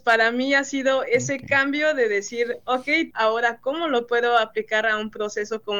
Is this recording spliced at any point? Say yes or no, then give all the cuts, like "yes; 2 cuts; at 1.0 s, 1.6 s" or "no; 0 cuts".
yes; 1 cut; at 3.1 s